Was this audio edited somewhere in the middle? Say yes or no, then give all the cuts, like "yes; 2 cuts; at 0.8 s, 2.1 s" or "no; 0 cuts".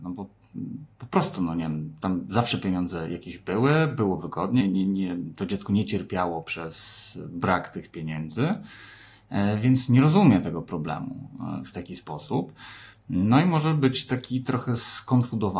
yes; 1 cut; at 4.6 s